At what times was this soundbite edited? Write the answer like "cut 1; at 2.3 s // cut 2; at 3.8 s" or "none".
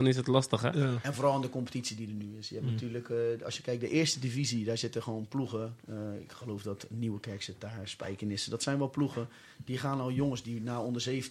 none